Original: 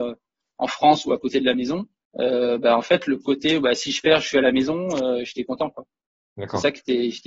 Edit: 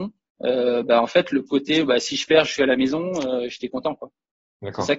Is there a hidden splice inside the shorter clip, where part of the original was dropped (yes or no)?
no